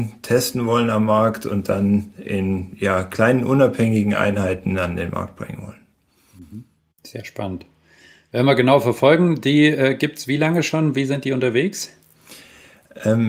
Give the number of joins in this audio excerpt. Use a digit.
0